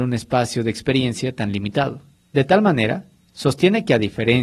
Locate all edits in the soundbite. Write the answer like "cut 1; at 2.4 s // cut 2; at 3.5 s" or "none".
none

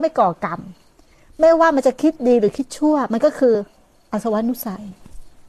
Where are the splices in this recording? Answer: none

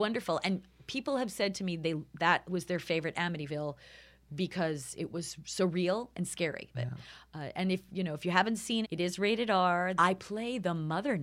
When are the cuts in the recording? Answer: cut 1; at 6.7 s // cut 2; at 8.8 s // cut 3; at 10.0 s

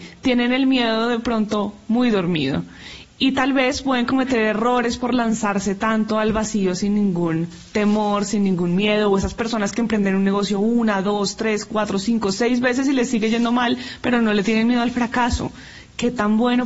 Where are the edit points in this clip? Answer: none

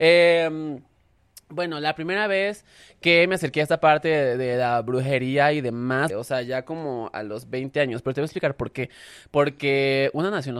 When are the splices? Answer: cut 1; at 6.1 s

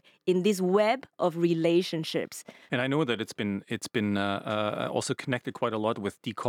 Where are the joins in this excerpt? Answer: cut 1; at 2.7 s

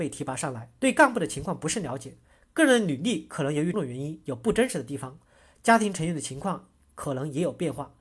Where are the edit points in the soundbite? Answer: cut 1; at 3.7 s

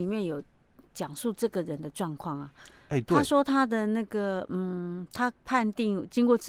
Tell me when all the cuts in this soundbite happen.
cut 1; at 5.4 s

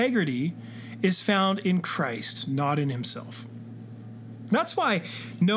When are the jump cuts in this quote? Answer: none

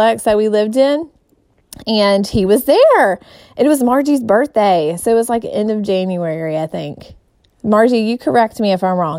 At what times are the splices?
none

